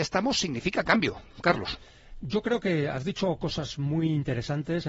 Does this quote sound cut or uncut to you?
uncut